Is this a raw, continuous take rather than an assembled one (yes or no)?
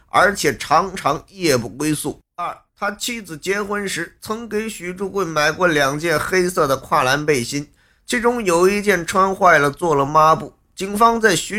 no